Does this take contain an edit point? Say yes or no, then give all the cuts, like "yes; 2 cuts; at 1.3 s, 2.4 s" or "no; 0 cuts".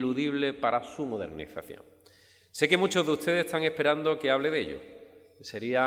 no; 0 cuts